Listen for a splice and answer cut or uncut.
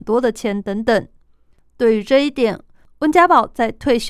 uncut